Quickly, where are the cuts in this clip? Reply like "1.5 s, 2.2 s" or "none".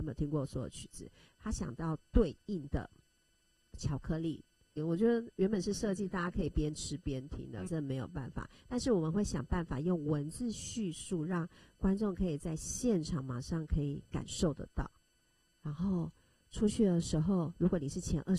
4.8 s, 7.7 s

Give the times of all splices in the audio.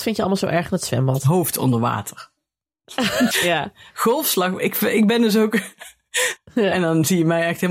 3.3 s, 6.4 s

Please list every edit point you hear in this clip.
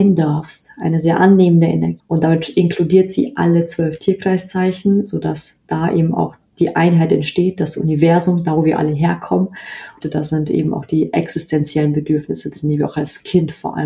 2.0 s, 10.0 s

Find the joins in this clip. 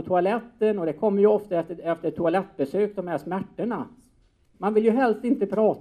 4.5 s

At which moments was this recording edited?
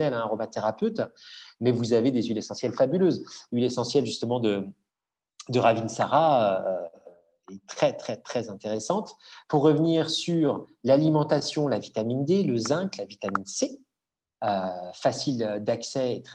none

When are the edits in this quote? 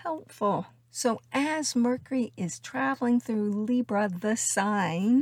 none

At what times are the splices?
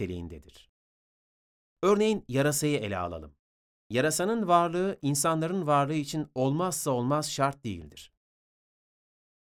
none

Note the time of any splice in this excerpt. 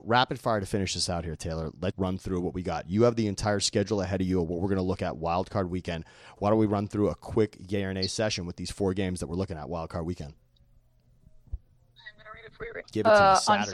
1.9 s, 12.8 s

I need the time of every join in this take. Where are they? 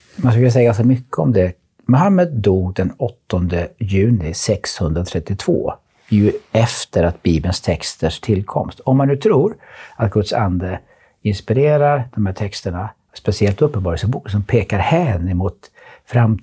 none

